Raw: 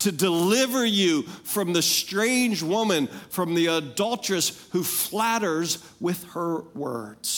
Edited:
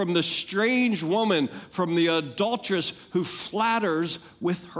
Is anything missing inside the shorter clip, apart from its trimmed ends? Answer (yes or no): no